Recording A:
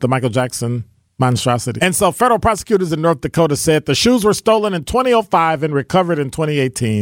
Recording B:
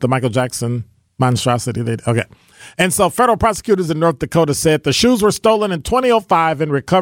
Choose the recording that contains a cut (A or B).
A